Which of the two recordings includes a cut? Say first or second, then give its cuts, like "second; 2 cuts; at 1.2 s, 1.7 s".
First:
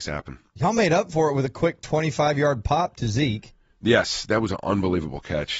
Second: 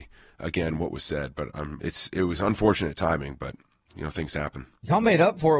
second; 2 cuts; at 1.8 s, 3.9 s